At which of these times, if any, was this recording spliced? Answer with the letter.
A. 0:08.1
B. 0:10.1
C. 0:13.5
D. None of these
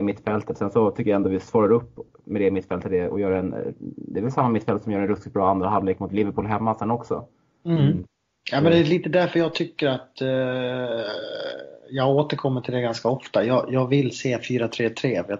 D